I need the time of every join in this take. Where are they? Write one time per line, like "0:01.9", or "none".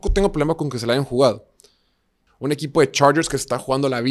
0:02.3